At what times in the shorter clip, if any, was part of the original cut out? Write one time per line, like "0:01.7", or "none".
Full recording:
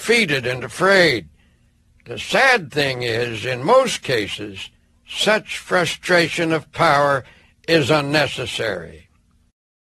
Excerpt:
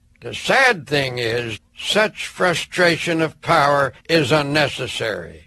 0:01.6
0:04.0